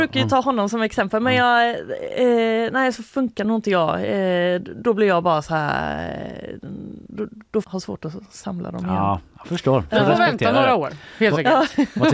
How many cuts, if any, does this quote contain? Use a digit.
1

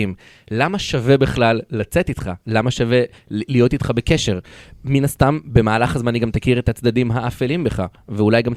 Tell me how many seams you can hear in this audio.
0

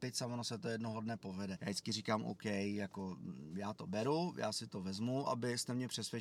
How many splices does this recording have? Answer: 2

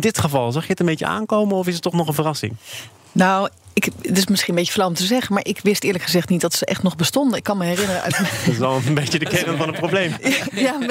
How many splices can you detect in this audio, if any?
0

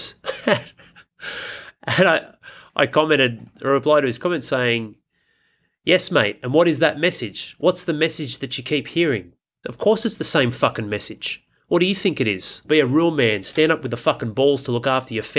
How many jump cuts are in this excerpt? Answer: 2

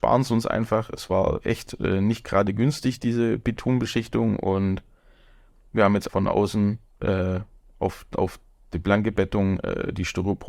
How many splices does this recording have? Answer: 1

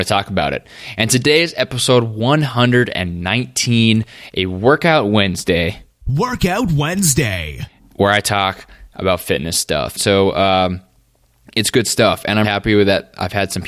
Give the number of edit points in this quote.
2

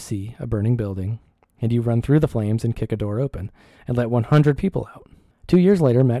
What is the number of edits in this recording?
1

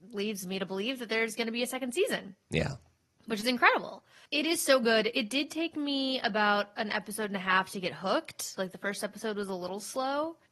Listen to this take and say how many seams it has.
0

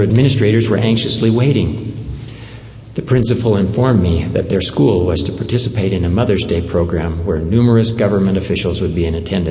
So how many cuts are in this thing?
0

